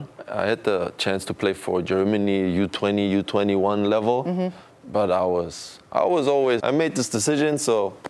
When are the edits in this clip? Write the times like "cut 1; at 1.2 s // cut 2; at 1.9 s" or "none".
cut 1; at 6.6 s

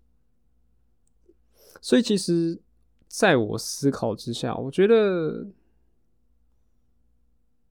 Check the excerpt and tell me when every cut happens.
none

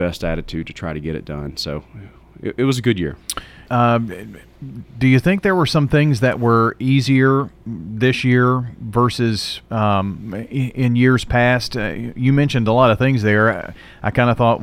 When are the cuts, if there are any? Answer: cut 1; at 3.7 s

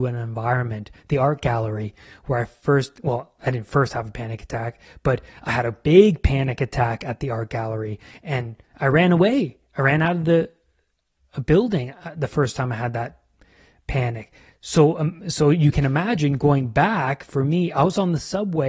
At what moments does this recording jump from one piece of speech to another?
none

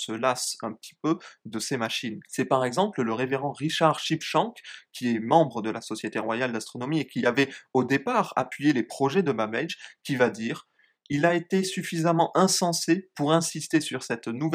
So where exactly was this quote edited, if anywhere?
cut 1; at 2.2 s

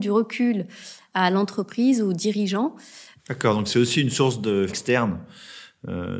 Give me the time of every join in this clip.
cut 1; at 3.2 s // cut 2; at 4.7 s

